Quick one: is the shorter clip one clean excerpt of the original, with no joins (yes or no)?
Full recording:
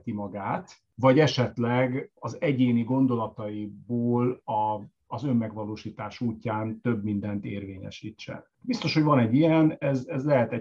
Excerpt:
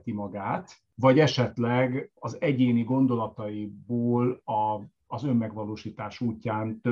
yes